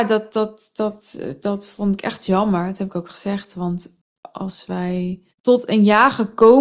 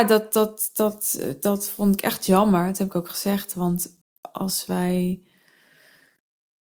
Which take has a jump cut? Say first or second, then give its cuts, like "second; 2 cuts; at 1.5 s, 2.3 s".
first; 1 cut; at 5.3 s